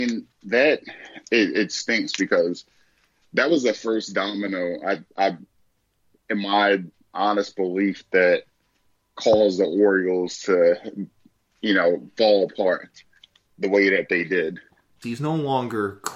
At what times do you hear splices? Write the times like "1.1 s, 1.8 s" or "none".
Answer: 15.0 s